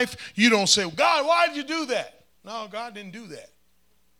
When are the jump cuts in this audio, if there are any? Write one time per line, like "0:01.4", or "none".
none